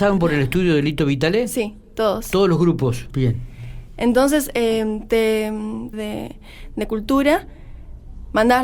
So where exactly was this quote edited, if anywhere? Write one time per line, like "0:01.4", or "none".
0:03.1
0:05.9